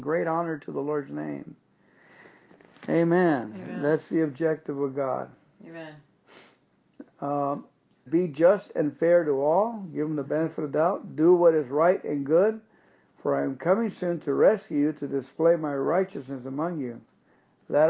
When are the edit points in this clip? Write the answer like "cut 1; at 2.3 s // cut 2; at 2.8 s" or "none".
cut 1; at 8.1 s